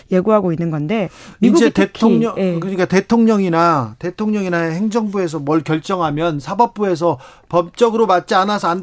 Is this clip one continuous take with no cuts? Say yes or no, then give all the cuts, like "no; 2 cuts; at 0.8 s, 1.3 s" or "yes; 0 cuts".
yes; 0 cuts